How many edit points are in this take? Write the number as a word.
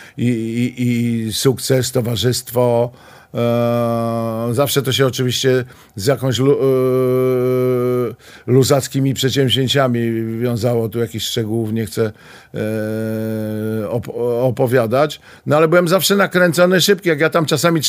zero